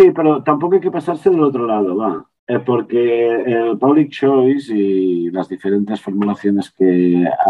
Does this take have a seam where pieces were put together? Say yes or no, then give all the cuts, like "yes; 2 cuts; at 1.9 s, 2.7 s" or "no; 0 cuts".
no; 0 cuts